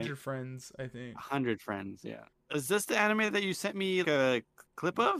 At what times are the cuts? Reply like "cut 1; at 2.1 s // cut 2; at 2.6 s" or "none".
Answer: cut 1; at 2.3 s // cut 2; at 4.0 s